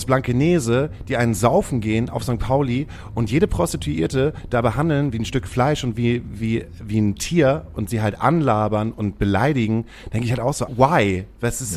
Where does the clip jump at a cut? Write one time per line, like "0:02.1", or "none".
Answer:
0:10.7